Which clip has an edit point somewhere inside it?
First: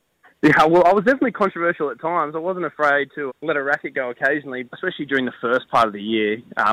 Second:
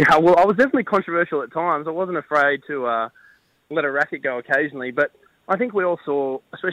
first; 2 cuts; at 3.3 s, 4.6 s

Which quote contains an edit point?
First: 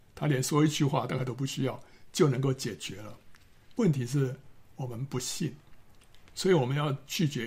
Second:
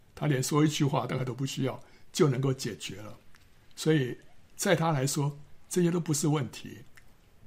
first; 1 cut; at 3.7 s

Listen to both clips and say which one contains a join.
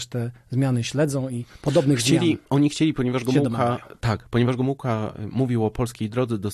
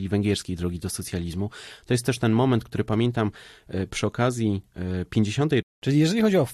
second; 1 cut; at 5.6 s

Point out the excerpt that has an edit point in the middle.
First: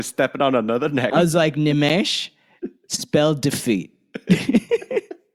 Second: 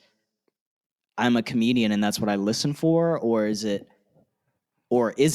first; 1 cut; at 1.1 s

